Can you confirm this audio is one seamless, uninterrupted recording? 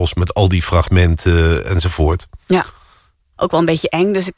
no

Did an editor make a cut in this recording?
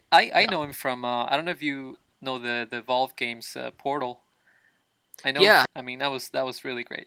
yes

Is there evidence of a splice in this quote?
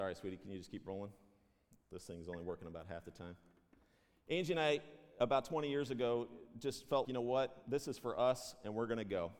yes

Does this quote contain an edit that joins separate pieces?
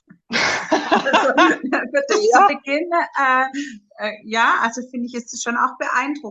no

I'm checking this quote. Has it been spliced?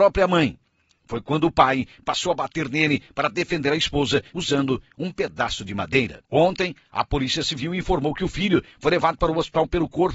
no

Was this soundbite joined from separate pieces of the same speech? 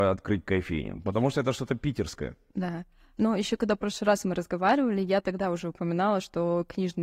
no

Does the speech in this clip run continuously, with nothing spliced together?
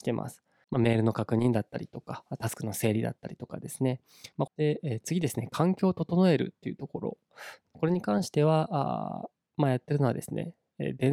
no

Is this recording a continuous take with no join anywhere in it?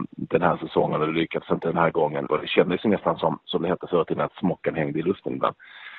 no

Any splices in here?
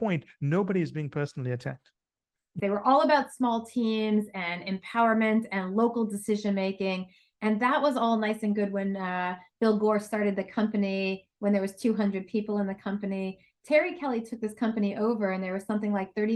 yes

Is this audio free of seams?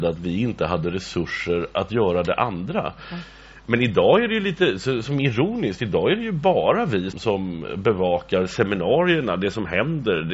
no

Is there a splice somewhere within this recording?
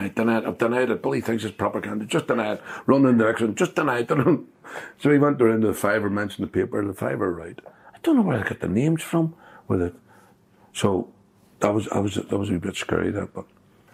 no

